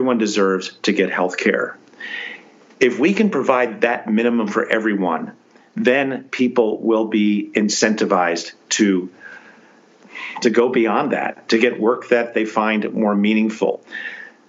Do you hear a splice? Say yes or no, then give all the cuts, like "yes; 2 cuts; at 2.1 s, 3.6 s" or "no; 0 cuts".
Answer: no; 0 cuts